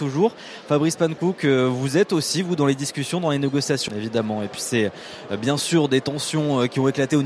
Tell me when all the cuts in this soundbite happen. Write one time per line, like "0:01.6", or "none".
0:03.9